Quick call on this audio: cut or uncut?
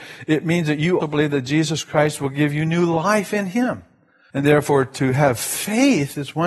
cut